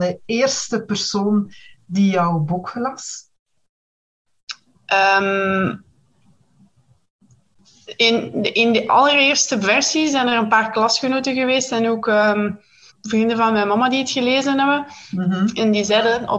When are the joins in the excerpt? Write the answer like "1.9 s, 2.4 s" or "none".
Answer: 12.9 s